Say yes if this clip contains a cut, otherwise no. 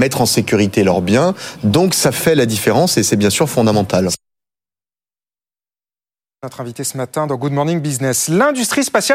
no